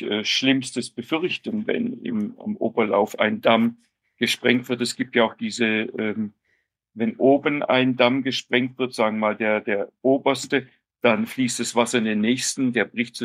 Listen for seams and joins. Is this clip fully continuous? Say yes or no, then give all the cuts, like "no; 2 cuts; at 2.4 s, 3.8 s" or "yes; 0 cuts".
yes; 0 cuts